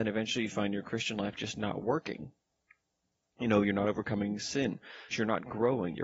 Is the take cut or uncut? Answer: cut